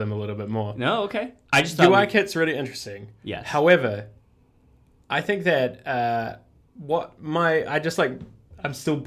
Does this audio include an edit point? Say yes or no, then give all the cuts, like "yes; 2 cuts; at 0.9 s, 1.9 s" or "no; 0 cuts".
no; 0 cuts